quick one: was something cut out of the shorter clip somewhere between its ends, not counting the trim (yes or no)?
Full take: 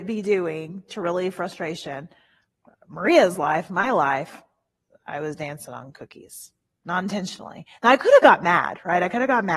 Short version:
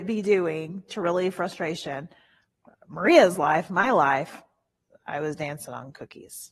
no